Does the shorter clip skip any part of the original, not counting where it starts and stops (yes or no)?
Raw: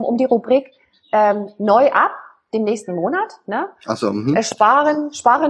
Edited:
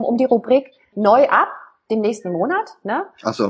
yes